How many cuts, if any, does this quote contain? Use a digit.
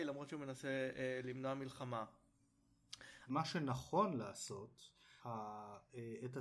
2